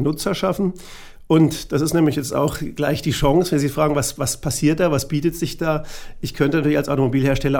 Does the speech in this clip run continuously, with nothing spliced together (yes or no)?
yes